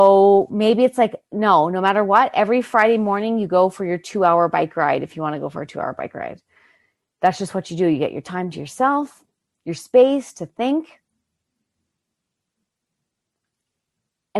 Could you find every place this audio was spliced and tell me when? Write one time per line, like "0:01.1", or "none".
none